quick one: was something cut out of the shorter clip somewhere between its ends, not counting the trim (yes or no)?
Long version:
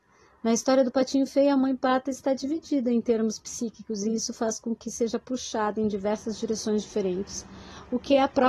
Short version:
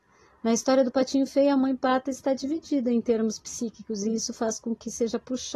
no